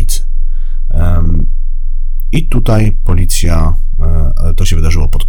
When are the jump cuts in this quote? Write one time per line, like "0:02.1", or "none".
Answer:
none